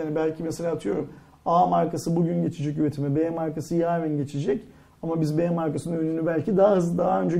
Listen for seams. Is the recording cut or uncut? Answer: uncut